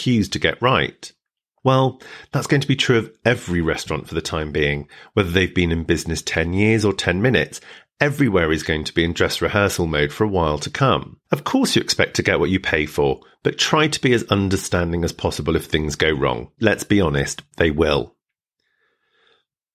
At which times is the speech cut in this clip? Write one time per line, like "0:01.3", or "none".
0:16.6